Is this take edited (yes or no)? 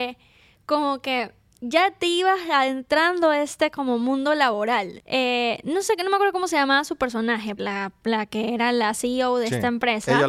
yes